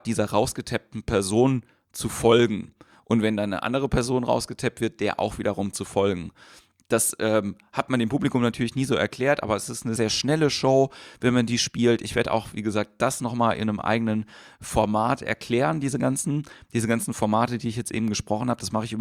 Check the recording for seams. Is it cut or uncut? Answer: cut